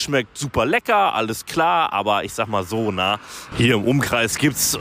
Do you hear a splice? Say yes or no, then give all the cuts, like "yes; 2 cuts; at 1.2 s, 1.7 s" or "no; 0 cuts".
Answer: no; 0 cuts